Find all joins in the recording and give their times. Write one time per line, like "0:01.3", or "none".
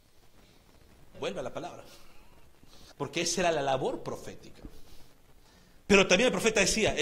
0:01.1
0:02.9
0:05.8

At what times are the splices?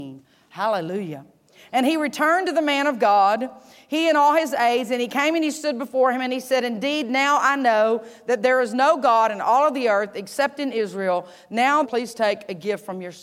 0:11.8

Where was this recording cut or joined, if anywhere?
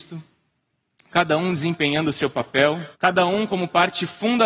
0:02.9

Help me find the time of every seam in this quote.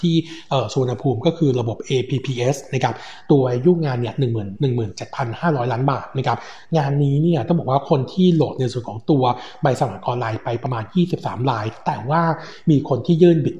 0:04.6

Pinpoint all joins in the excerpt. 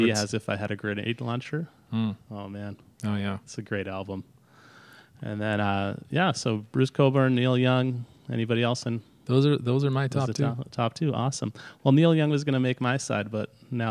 none

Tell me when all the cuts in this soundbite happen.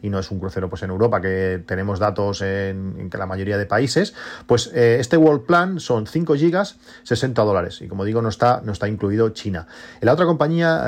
none

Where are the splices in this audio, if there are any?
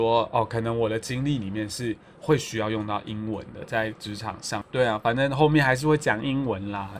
0:04.6

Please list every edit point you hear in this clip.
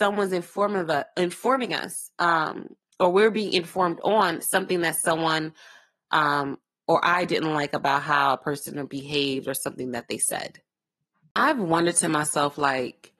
none

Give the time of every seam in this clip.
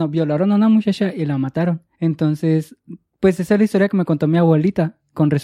0:01.9

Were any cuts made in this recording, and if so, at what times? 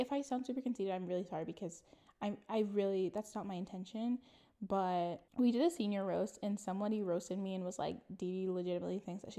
none

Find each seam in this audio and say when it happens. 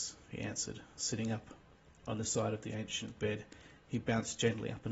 none

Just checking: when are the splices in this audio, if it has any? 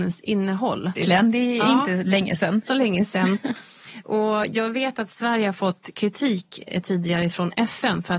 0:01.0
0:02.7

